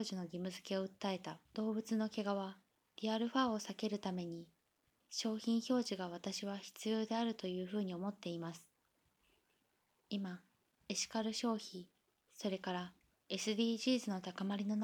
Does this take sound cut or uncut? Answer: cut